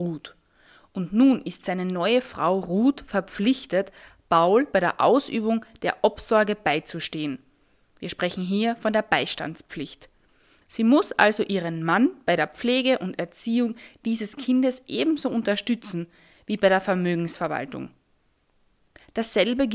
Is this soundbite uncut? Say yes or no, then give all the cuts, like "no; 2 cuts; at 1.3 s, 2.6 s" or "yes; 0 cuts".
yes; 0 cuts